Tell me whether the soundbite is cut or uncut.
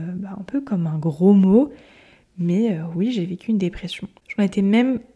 cut